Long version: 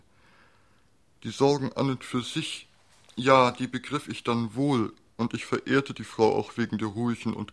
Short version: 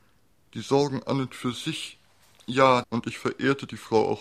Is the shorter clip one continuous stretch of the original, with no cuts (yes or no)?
no